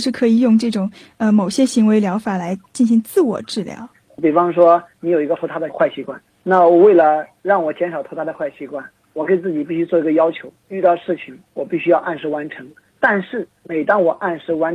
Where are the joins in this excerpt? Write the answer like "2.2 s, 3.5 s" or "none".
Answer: 4.1 s